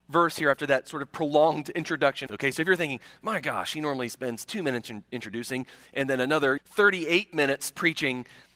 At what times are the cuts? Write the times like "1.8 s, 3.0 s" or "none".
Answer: 2.3 s, 6.6 s